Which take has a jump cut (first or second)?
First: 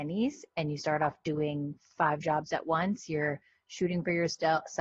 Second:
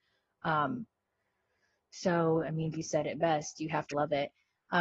second